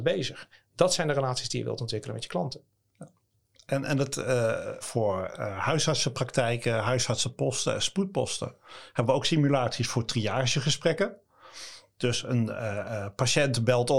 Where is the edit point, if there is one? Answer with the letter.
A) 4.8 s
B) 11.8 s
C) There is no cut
A